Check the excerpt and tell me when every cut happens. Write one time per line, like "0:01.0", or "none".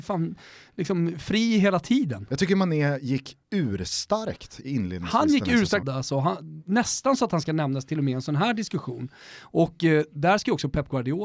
0:05.8